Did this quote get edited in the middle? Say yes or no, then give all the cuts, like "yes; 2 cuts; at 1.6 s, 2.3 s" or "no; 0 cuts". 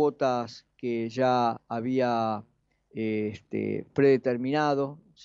no; 0 cuts